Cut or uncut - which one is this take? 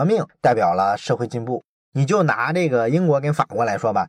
uncut